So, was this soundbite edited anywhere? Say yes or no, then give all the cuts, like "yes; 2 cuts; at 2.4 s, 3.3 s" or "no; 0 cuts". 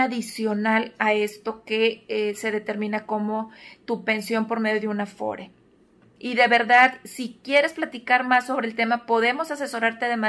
yes; 1 cut; at 6.2 s